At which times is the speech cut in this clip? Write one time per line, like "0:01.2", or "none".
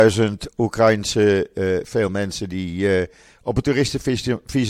0:01.8